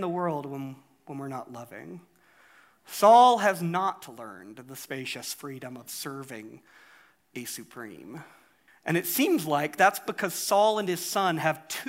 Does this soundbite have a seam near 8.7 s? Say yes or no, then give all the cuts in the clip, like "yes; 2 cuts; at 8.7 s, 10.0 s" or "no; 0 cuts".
yes; 1 cut; at 8.7 s